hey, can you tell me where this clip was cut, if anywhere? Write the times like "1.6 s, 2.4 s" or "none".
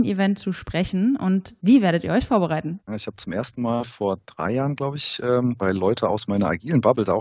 2.9 s, 5.6 s